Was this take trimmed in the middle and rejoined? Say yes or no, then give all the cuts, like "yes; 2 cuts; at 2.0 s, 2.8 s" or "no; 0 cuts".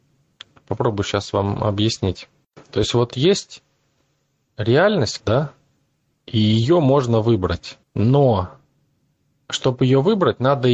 yes; 2 cuts; at 5.2 s, 7.8 s